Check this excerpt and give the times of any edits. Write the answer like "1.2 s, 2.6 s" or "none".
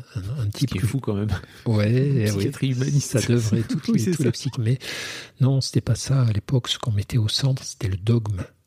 4.5 s